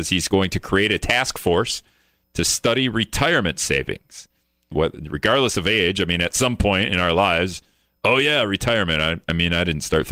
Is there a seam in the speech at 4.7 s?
yes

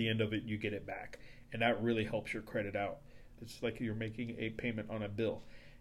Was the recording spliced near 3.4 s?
yes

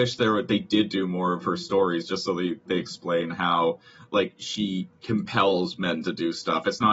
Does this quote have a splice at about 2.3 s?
no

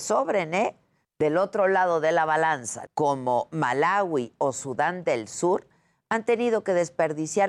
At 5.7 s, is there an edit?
no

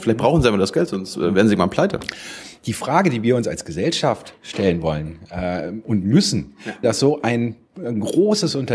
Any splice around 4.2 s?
no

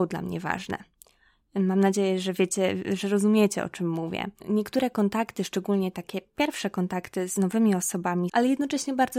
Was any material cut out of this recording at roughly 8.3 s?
yes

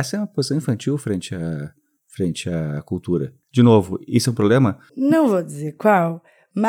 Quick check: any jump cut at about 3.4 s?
no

